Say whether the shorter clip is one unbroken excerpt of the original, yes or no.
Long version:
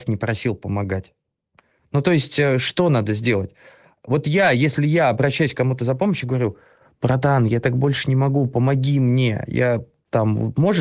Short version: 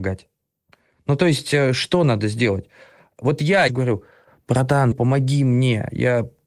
no